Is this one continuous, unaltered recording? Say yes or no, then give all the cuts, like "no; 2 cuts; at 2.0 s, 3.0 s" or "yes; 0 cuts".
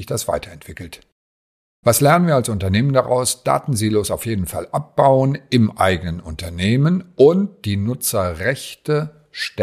yes; 0 cuts